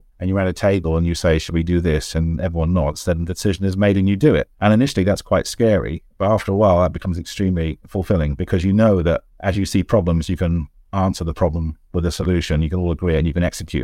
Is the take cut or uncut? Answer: uncut